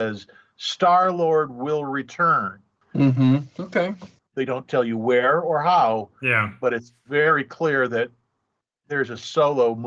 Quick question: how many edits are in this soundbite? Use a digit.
2